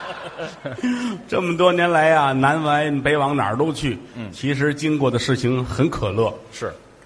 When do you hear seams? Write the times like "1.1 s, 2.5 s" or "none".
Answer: none